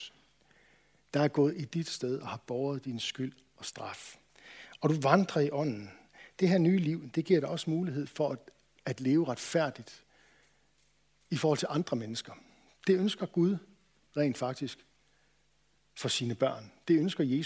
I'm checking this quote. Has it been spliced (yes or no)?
no